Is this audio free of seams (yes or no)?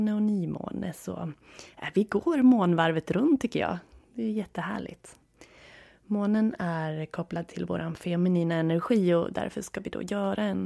yes